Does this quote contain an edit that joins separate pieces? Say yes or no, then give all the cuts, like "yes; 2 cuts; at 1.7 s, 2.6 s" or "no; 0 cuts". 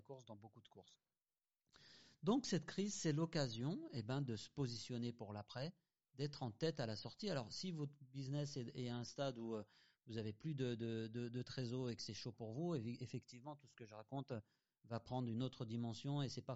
no; 0 cuts